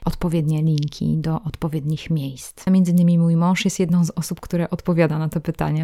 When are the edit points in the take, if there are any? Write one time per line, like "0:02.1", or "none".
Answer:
0:02.7

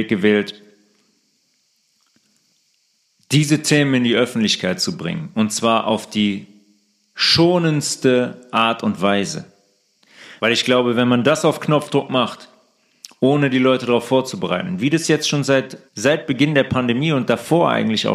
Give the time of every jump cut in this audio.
0:10.4
0:15.9

